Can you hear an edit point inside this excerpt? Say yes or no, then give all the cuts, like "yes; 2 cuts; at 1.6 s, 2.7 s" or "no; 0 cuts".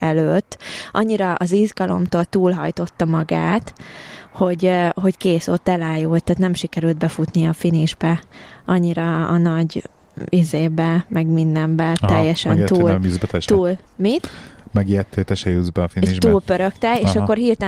no; 0 cuts